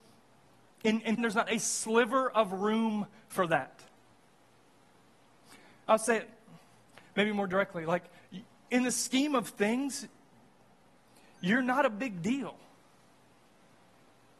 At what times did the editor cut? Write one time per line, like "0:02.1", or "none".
0:01.2